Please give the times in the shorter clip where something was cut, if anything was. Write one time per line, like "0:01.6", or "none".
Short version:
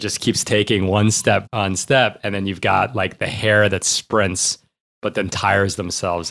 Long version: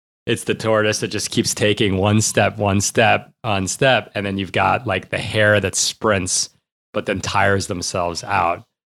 0:01.4